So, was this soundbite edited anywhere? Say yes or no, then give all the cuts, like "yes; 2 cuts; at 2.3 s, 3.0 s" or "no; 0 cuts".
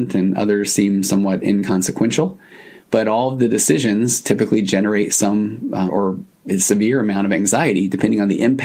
yes; 1 cut; at 5.9 s